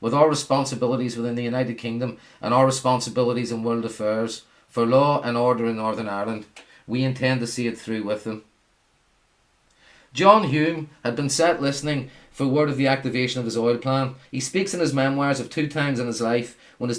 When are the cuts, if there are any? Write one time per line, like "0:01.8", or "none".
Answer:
0:14.2